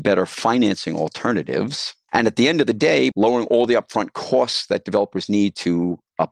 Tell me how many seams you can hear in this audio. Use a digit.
2